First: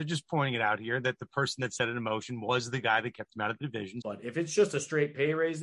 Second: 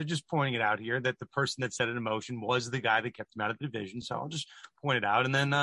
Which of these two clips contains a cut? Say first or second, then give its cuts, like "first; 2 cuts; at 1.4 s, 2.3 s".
first; 1 cut; at 4.0 s